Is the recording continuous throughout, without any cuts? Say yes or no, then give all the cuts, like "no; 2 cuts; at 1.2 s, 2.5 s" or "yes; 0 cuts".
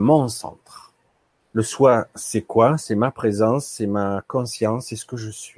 no; 1 cut; at 1.4 s